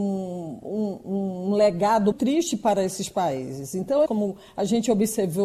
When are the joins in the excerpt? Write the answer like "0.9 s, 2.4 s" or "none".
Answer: 2.1 s, 4.1 s

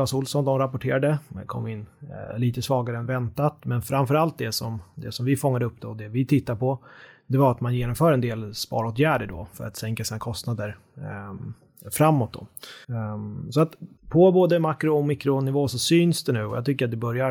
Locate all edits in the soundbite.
12.8 s, 14.0 s

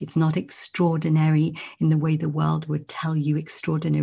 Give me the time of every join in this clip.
none

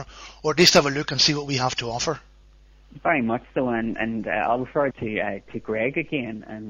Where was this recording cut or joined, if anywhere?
4.9 s

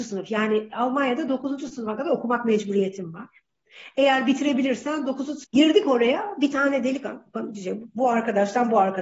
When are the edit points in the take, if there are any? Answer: 5.4 s

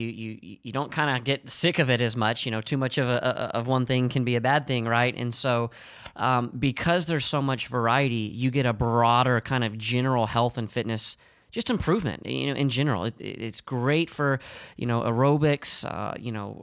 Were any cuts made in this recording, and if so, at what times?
none

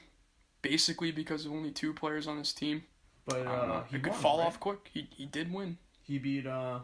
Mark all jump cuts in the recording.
none

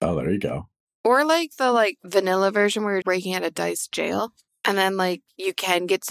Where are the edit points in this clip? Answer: 3.0 s, 4.5 s

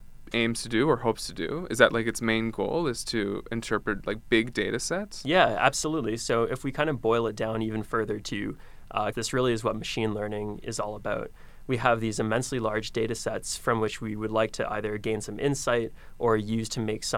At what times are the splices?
9.1 s

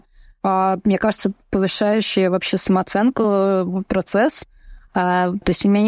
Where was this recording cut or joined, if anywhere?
4.9 s

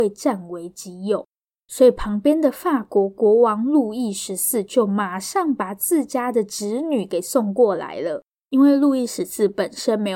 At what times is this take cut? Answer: none

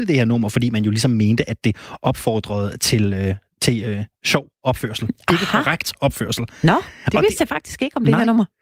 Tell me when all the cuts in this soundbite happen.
none

